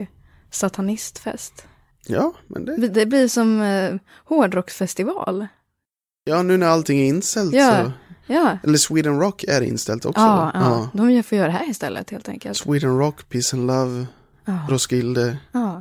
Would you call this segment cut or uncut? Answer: uncut